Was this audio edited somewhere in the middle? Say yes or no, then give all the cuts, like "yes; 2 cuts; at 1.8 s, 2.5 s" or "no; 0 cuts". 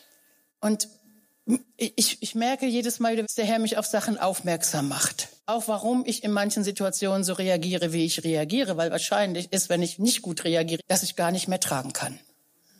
yes; 3 cuts; at 3.2 s, 5.4 s, 10.8 s